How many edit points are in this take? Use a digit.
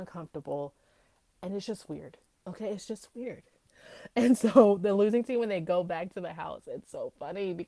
0